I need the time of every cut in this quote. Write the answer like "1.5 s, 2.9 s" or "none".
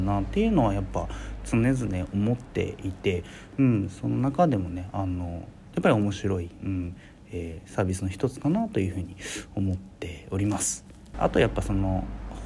11.1 s